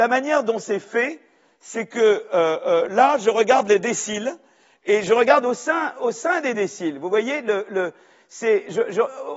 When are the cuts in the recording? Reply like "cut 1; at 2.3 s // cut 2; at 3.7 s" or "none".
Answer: none

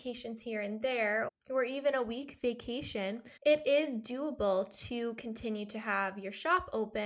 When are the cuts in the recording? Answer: cut 1; at 1.3 s // cut 2; at 3.4 s

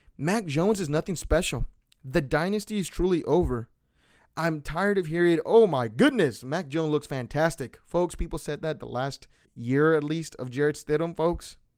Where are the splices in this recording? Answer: cut 1; at 9.4 s

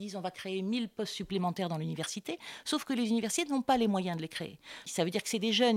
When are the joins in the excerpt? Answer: cut 1; at 4.9 s

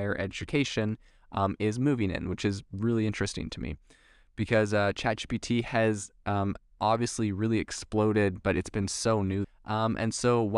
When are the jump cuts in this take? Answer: cut 1; at 9.4 s

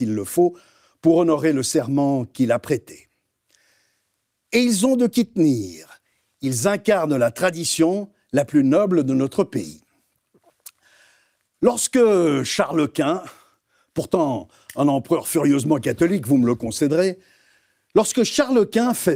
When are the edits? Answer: none

